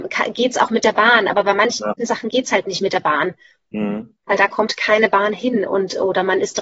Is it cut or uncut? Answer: uncut